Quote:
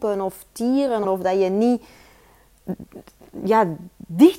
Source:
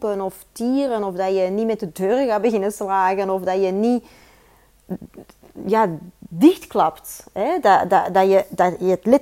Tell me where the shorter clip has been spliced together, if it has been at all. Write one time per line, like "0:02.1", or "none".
0:01.0